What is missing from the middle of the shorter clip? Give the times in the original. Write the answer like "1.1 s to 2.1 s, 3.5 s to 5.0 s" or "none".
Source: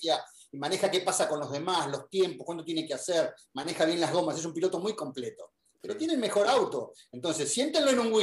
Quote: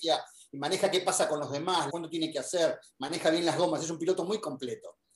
1.9 s to 2.4 s